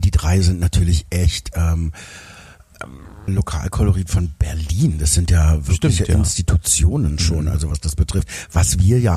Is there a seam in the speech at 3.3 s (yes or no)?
yes